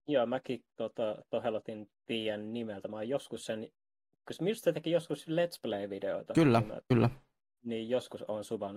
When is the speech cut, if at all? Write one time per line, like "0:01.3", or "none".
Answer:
0:02.0
0:06.8